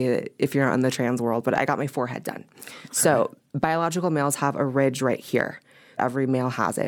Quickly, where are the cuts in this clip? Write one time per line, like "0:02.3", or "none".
0:06.0

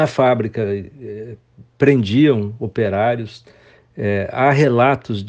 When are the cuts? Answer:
none

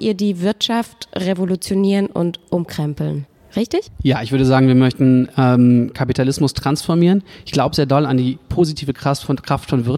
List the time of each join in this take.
none

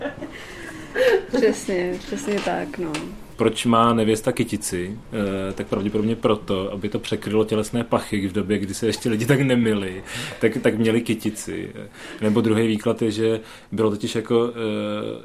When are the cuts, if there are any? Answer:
0:03.3

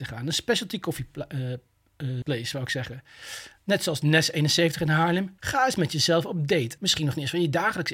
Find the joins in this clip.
0:02.2
0:05.4
0:06.8

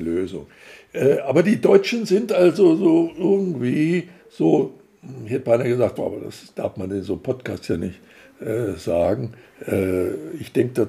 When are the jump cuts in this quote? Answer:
0:06.0
0:09.4

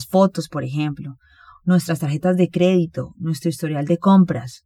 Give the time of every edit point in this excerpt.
none

